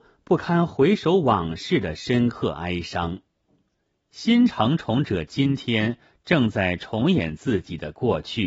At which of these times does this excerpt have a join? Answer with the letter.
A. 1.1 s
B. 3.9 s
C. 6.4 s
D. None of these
B